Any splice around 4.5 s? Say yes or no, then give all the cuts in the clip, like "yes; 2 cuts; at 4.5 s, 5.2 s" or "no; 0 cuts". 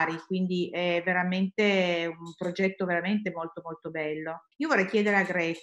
yes; 1 cut; at 4.5 s